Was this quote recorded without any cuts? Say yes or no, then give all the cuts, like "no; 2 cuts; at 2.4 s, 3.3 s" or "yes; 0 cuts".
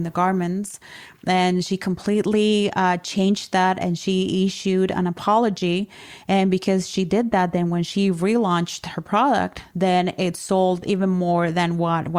yes; 0 cuts